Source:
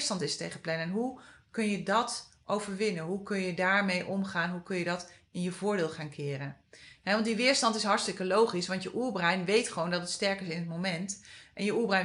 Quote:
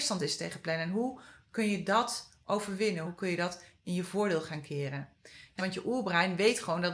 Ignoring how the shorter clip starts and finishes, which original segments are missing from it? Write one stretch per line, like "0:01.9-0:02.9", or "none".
0:03.0-0:04.5
0:07.1-0:08.7